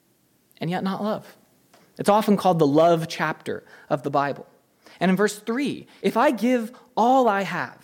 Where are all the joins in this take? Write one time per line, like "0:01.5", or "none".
0:01.8
0:06.0